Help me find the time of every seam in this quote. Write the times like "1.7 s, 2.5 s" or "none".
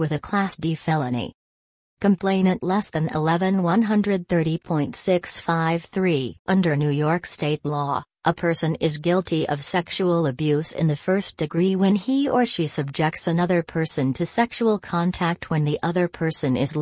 6.4 s